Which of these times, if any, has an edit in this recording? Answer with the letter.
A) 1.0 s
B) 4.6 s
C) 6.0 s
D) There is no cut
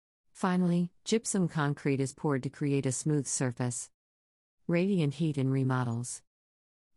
A